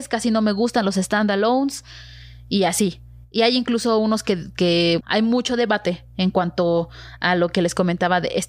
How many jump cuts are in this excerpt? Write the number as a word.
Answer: one